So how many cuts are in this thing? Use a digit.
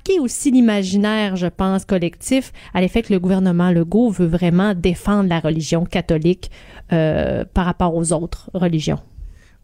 0